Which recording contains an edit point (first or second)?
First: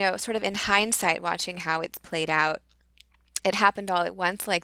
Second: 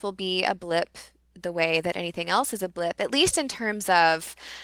first